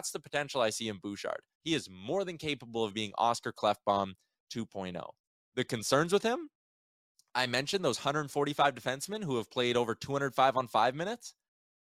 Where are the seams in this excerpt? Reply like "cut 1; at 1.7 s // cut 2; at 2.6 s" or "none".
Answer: cut 1; at 1.6 s